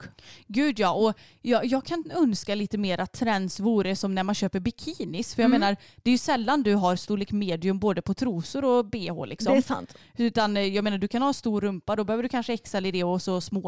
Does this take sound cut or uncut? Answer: uncut